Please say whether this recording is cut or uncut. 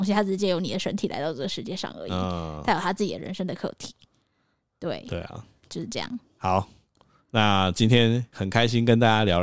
uncut